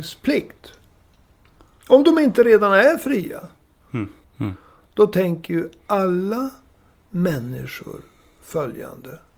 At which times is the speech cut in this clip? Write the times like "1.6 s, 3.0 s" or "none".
4.2 s